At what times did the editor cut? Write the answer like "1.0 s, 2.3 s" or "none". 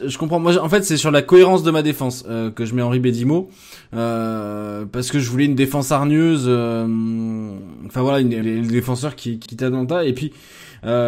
8.4 s, 9.5 s